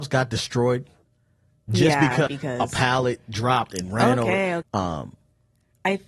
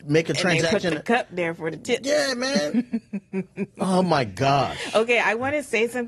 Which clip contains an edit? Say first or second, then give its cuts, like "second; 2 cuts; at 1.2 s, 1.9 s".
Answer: first; 2 cuts; at 2.3 s, 4.6 s